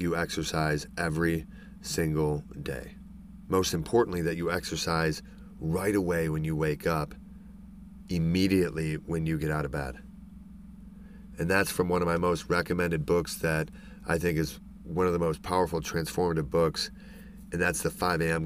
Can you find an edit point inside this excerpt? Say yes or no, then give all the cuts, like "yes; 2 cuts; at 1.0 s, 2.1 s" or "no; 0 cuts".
no; 0 cuts